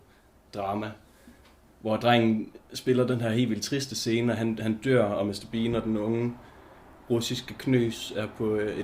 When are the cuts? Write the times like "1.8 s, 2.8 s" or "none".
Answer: 5.5 s